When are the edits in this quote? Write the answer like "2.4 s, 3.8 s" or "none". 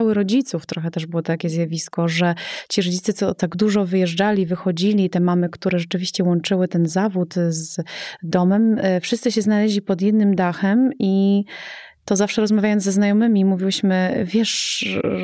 none